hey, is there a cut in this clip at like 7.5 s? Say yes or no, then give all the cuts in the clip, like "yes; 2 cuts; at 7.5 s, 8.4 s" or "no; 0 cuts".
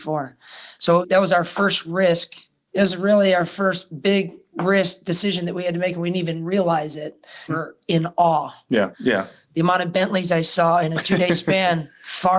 yes; 2 cuts; at 7.5 s, 8.9 s